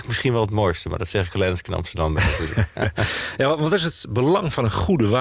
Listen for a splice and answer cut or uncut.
uncut